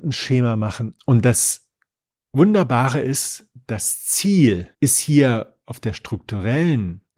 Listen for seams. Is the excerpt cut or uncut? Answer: cut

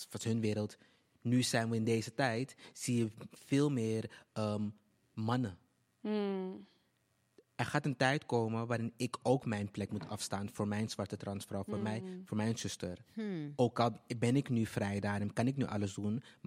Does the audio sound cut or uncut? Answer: uncut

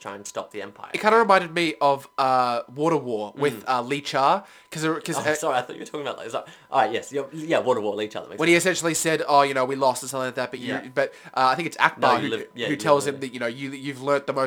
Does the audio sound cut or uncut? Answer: uncut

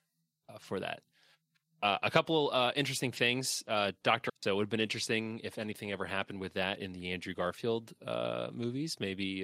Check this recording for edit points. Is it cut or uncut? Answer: cut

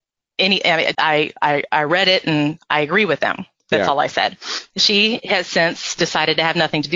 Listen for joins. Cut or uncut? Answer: cut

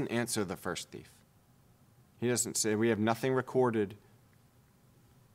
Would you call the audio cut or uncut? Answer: uncut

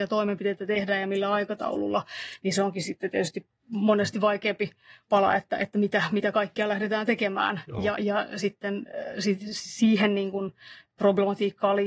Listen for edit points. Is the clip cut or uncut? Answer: uncut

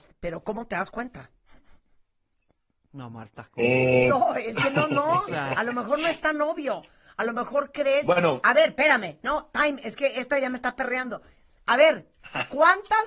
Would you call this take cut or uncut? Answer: uncut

